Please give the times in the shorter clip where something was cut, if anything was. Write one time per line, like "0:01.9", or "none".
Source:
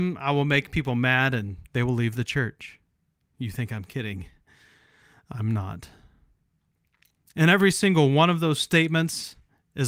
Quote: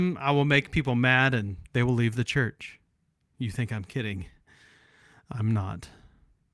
none